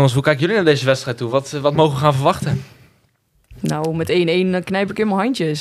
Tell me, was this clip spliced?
no; 0 cuts

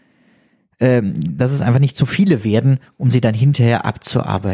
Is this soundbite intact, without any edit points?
yes; 0 cuts

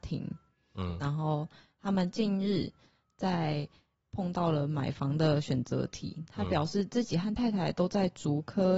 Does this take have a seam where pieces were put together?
no; 0 cuts

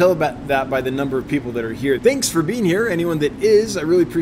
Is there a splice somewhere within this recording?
yes; 1 cut; at 2.0 s

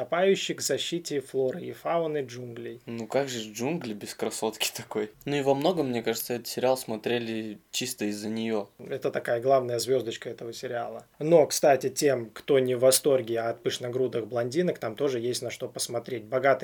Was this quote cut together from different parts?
no; 0 cuts

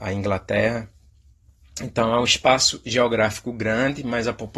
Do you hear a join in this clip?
no; 0 cuts

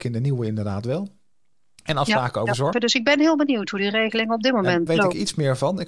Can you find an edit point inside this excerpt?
yes; 2 cuts; at 2.7 s, 4.9 s

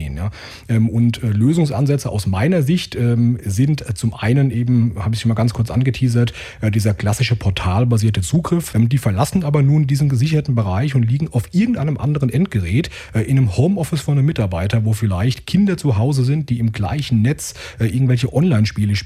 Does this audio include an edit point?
yes; 1 cut; at 8.7 s

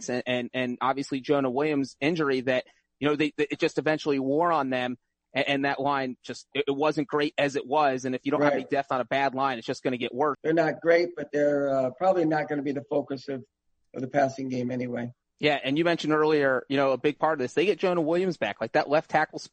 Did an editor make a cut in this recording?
yes; 1 cut; at 10.3 s

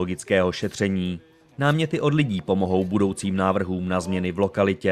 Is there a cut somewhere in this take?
no; 0 cuts

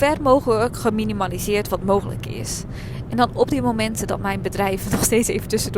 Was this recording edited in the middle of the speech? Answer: no; 0 cuts

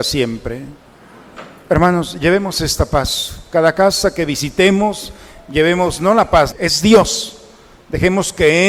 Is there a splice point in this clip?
yes; 1 cut; at 6.5 s

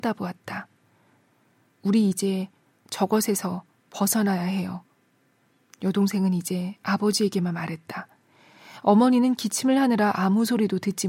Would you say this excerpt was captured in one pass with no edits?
yes; 0 cuts

